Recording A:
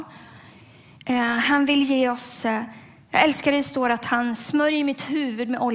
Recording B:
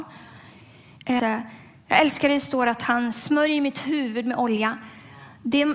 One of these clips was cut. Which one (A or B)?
B